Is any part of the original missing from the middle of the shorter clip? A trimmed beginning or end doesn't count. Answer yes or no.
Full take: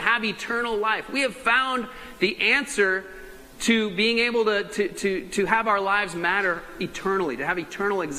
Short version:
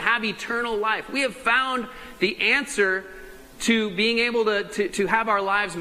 yes